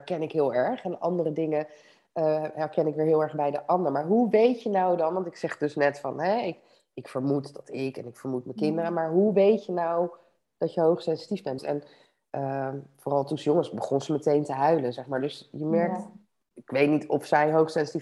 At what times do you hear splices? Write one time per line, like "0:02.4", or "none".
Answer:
0:11.6